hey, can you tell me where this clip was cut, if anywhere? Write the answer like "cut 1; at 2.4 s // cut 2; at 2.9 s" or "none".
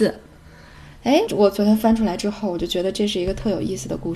cut 1; at 1.3 s